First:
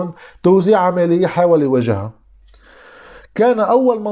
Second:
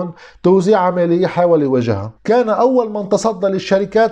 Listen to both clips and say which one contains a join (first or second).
second